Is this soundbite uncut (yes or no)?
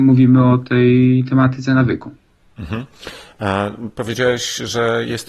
yes